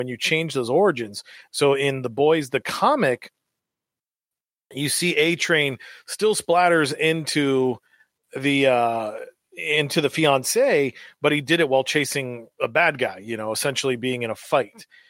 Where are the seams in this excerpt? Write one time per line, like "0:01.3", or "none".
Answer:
none